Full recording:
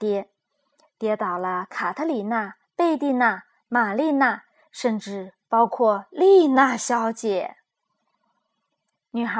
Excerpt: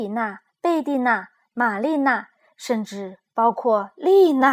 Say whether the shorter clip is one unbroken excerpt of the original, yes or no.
yes